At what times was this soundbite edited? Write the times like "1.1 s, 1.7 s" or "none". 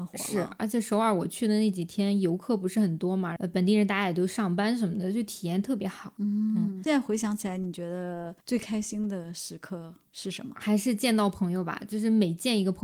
none